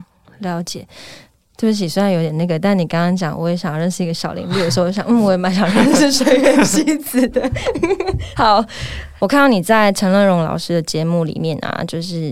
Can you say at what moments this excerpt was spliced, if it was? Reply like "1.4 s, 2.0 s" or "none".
none

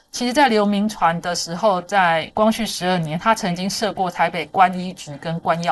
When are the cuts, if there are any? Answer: none

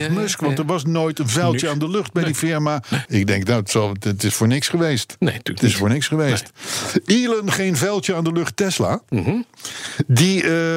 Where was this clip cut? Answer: 3.1 s

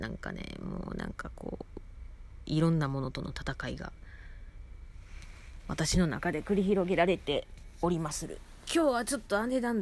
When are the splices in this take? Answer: 8.6 s

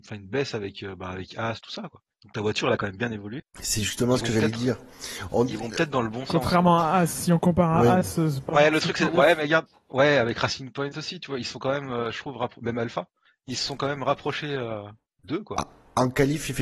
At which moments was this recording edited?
none

